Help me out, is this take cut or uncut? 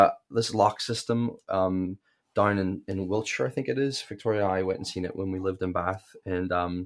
uncut